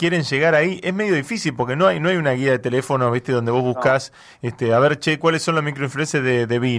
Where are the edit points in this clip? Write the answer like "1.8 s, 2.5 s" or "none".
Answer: none